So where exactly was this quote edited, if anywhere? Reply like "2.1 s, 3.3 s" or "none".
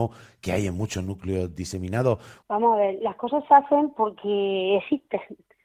2.4 s